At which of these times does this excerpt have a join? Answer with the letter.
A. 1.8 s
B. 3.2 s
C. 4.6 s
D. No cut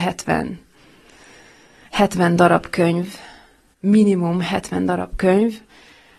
D